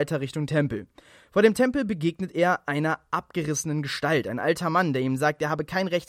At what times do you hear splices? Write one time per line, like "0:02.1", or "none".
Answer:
none